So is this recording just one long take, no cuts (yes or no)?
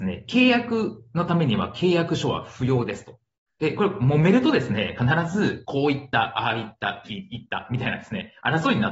no